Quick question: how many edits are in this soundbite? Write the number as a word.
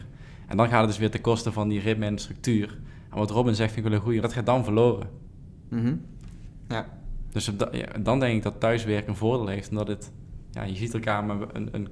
one